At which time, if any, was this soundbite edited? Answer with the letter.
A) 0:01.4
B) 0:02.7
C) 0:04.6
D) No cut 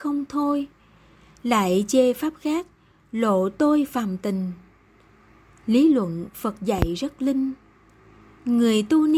D